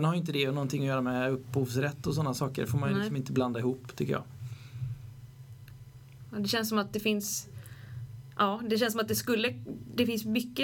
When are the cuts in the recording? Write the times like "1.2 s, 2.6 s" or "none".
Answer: none